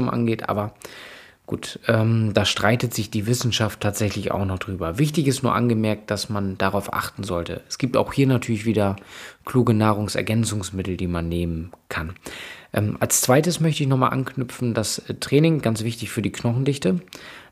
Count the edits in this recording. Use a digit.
0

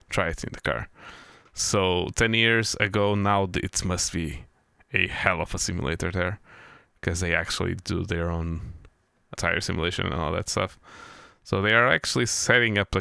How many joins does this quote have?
2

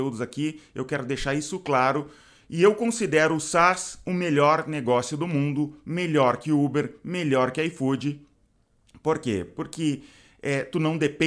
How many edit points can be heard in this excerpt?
0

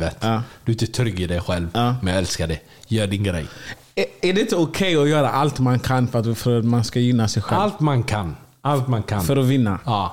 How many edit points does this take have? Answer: 0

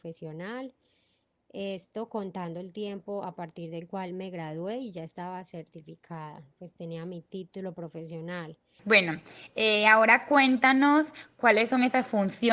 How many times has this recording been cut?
1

